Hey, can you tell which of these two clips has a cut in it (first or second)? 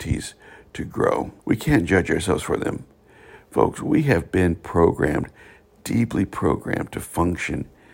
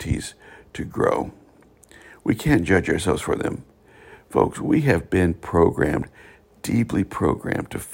first